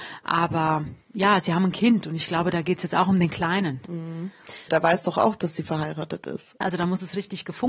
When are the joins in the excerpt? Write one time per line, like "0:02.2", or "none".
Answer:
0:04.7
0:06.6